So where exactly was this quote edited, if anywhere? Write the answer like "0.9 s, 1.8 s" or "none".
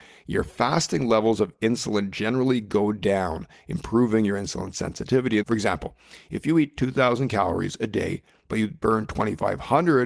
5.4 s